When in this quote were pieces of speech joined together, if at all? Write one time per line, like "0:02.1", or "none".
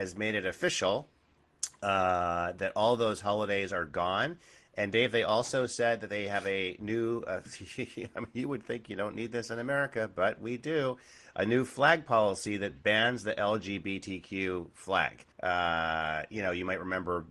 0:15.3